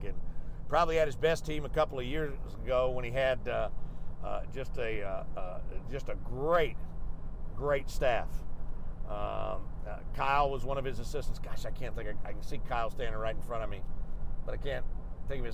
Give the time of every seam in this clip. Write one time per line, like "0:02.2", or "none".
none